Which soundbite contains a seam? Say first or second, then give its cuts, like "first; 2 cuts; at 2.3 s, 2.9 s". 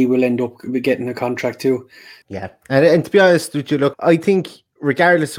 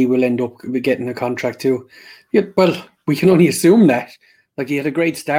first; 2 cuts; at 2.2 s, 3.9 s